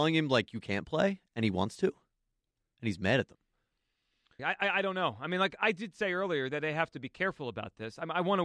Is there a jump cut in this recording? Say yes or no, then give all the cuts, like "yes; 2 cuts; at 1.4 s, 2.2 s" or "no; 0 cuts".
yes; 2 cuts; at 4.4 s, 5.6 s